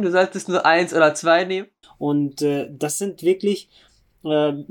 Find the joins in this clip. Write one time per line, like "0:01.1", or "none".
0:01.8